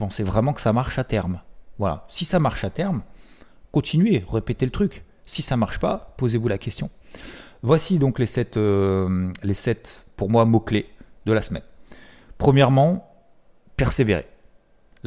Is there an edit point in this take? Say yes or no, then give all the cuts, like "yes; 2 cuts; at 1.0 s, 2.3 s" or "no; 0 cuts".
no; 0 cuts